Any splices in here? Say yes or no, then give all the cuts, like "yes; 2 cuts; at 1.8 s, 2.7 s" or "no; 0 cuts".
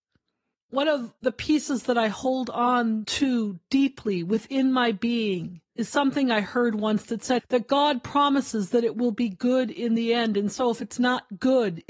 no; 0 cuts